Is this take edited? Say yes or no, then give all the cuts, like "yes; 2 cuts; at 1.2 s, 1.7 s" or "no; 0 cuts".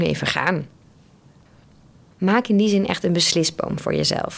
yes; 1 cut; at 2.1 s